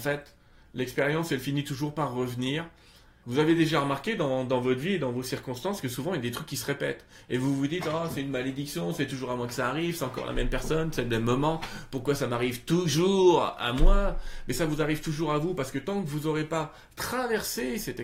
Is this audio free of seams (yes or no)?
no